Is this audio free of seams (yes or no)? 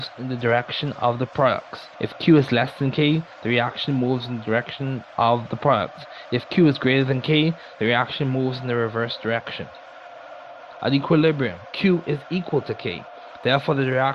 no